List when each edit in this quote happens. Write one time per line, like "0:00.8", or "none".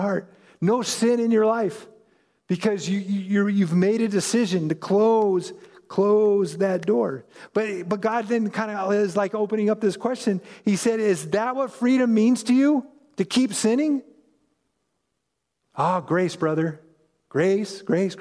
none